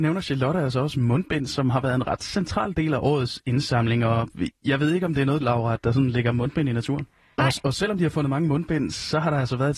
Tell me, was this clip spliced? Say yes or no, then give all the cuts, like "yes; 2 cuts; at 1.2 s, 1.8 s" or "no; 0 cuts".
yes; 2 cuts; at 5.4 s, 7.4 s